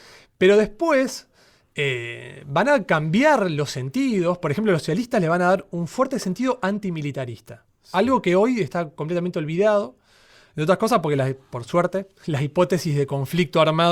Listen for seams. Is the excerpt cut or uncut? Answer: uncut